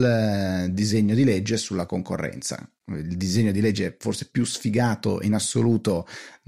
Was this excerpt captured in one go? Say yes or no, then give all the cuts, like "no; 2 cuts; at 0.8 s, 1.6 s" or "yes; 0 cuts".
yes; 0 cuts